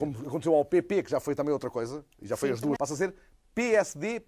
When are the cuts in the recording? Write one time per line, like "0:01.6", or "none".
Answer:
0:02.8

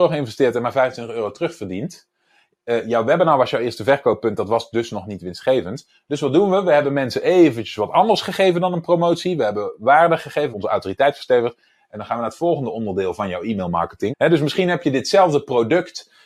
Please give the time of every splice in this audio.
0:10.5
0:14.1

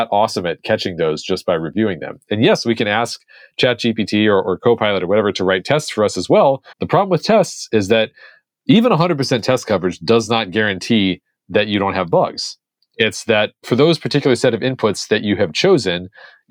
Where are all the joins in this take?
0:06.7

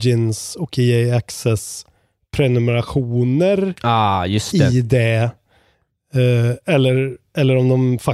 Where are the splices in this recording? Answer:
none

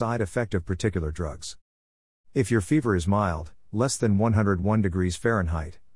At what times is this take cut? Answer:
0:02.2

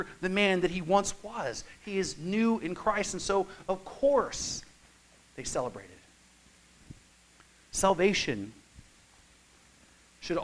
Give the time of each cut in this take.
none

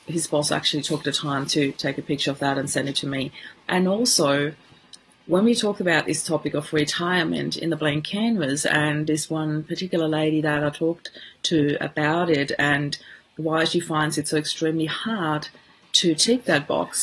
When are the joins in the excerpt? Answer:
0:03.7

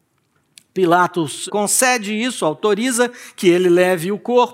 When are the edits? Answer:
0:01.5

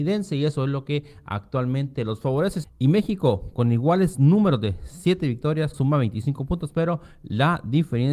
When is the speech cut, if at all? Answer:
0:02.6
0:05.7

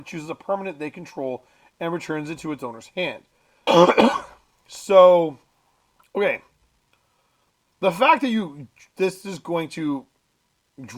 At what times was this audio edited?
0:03.7

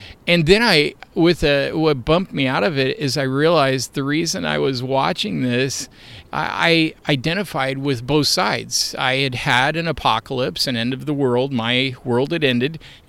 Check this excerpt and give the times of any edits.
none

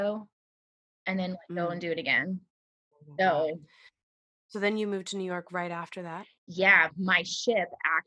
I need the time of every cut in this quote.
none

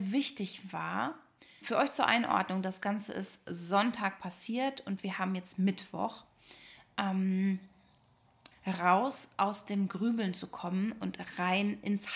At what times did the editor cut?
0:01.6
0:08.5

